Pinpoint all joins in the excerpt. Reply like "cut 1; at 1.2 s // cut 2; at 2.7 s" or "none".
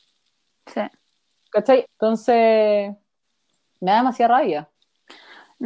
cut 1; at 1.9 s